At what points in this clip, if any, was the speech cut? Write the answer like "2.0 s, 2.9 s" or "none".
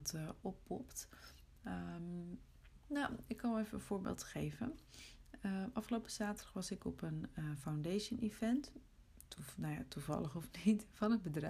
none